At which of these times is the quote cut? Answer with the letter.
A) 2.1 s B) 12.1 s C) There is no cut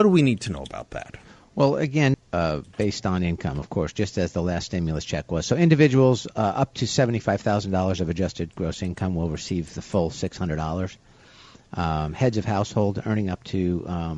A